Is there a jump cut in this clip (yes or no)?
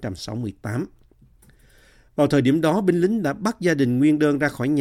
no